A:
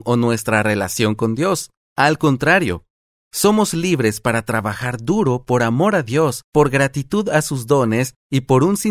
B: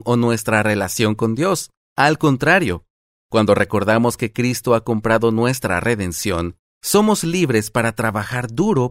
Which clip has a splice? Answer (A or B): A